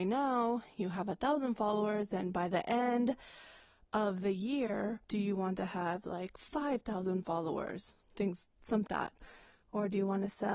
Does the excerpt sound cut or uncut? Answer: cut